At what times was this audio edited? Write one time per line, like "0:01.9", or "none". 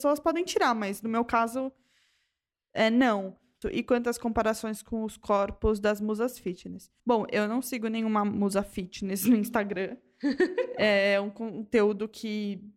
0:03.6
0:07.0

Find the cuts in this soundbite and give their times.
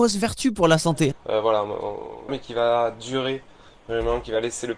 0:01.1
0:02.3

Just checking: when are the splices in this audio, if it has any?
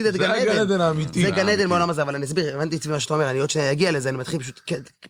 none

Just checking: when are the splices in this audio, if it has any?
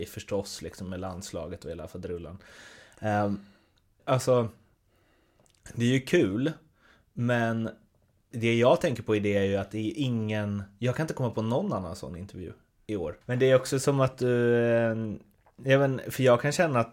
0:04.0
0:08.3
0:13.2

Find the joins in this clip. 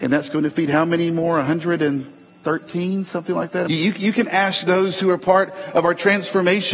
0:03.7

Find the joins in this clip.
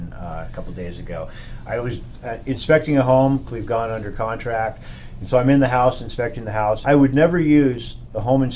0:03.5
0:06.8

